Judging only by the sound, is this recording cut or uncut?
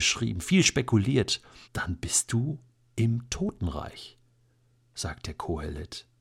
cut